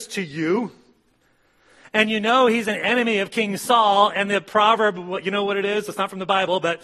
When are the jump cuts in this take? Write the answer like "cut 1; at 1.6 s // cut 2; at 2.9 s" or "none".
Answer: none